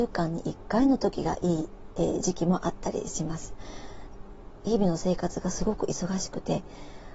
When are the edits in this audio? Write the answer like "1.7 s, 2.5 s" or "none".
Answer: none